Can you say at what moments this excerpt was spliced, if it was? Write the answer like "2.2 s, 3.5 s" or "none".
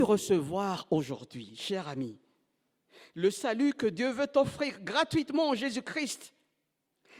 none